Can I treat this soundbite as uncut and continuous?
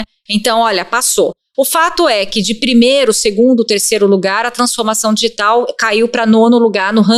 yes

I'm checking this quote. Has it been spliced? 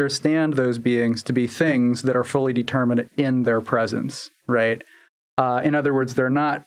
no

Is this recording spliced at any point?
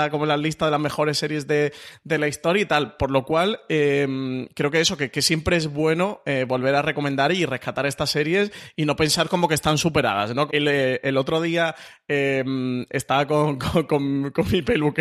yes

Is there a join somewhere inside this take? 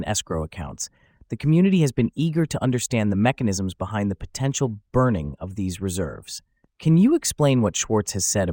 yes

